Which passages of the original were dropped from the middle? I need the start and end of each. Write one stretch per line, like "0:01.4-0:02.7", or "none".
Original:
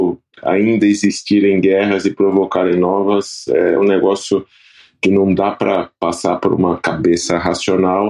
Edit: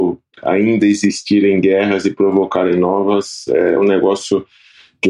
none